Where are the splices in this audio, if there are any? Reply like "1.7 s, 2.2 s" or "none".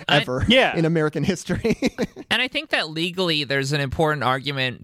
none